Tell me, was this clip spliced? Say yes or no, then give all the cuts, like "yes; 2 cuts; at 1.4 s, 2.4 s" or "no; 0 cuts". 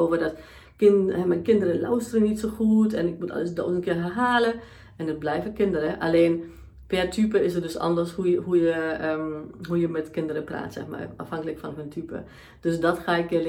no; 0 cuts